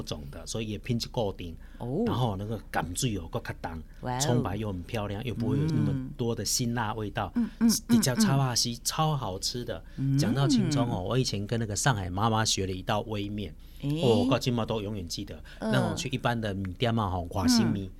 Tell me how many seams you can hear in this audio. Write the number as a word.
zero